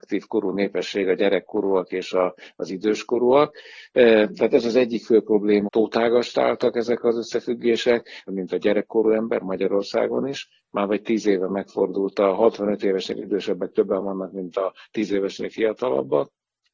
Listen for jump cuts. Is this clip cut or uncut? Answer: cut